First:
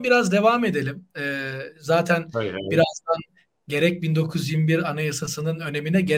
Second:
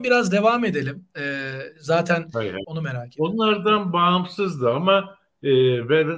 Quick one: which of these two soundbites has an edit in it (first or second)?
second